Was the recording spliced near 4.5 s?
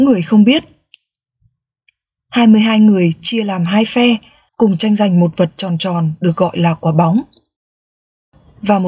yes; 1 cut; at 4.5 s

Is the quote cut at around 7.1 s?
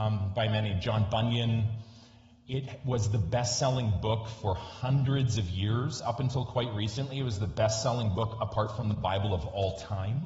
no; 0 cuts

